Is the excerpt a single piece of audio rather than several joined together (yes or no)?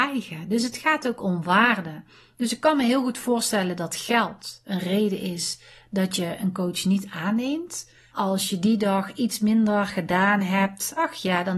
no